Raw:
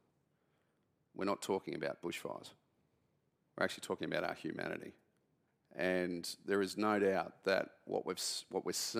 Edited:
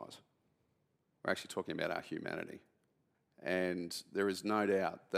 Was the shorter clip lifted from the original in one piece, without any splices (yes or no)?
yes